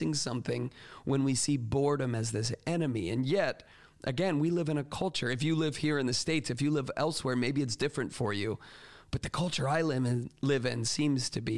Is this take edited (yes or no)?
no